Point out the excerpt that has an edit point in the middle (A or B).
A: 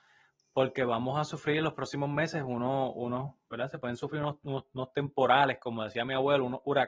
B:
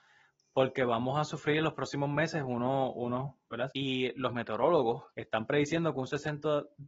B